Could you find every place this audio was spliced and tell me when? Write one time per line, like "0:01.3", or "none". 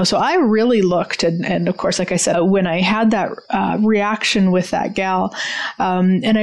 0:02.3